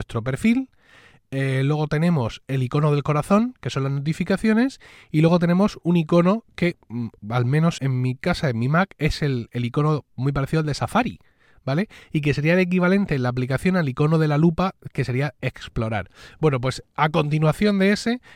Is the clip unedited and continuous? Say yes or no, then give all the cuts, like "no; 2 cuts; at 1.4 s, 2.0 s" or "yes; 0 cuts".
no; 1 cut; at 7.8 s